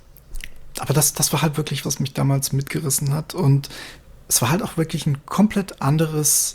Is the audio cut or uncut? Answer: cut